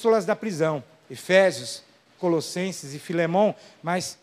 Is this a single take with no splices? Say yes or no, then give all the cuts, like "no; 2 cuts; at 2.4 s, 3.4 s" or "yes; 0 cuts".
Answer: no; 1 cut; at 2.2 s